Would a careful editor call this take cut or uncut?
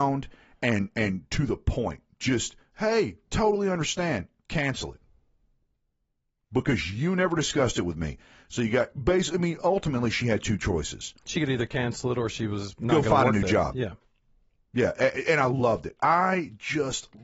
uncut